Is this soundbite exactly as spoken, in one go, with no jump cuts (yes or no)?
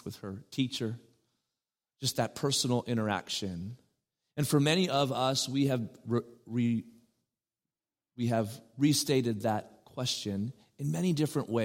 yes